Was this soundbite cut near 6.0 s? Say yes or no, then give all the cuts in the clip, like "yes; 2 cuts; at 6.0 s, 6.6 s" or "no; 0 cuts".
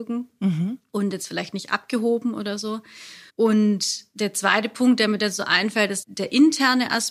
yes; 2 cuts; at 3.3 s, 6.0 s